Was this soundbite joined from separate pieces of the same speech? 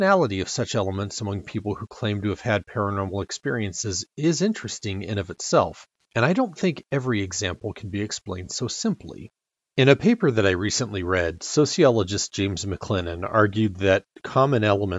no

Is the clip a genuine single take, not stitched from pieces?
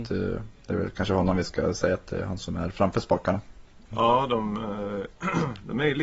no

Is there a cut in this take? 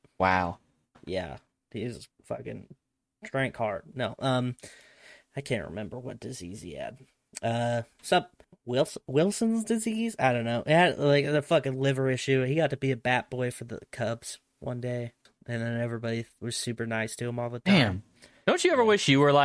no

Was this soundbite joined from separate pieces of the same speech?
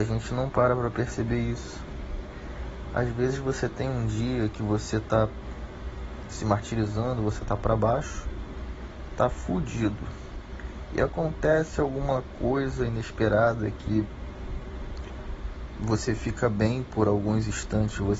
no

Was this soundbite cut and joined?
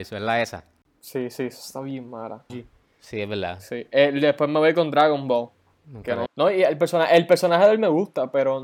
yes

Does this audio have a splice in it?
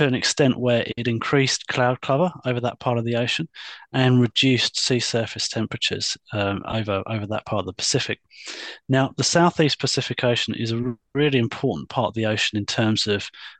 no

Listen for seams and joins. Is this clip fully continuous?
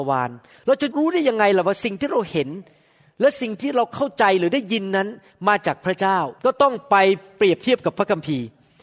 no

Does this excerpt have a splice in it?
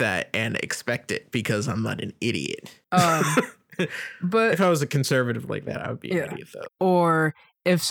yes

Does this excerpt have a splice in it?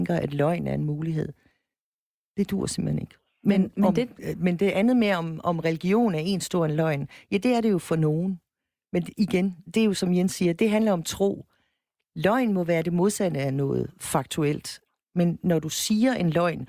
no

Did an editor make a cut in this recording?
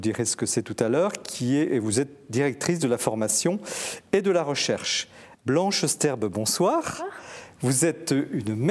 yes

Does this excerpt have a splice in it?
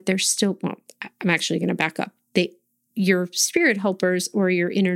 no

